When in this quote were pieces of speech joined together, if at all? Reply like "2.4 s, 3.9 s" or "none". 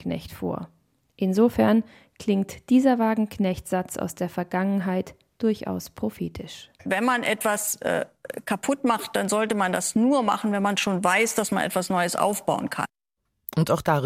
none